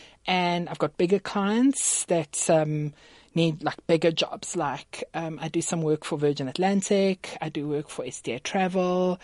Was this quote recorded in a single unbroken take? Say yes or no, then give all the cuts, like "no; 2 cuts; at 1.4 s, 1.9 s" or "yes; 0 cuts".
yes; 0 cuts